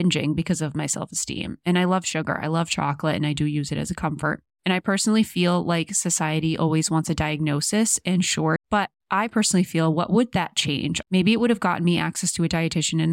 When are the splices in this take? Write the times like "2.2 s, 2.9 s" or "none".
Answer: 8.6 s, 11.0 s